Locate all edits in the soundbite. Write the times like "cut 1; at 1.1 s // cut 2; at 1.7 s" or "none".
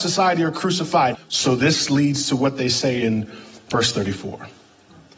cut 1; at 1.1 s